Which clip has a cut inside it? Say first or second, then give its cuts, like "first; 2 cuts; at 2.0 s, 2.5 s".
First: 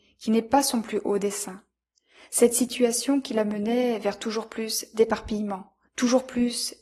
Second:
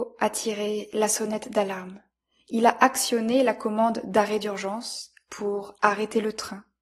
first; 1 cut; at 5.9 s